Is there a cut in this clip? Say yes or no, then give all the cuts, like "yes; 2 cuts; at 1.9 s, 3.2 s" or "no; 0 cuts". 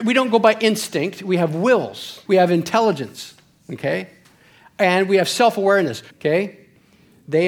yes; 2 cuts; at 2.3 s, 6.1 s